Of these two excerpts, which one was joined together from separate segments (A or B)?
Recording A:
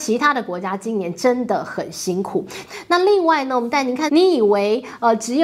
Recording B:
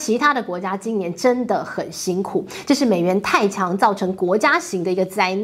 A